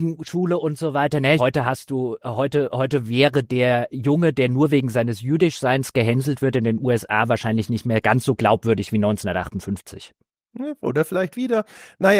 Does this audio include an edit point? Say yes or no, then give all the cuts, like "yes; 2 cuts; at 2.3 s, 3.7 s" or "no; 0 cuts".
yes; 1 cut; at 1.4 s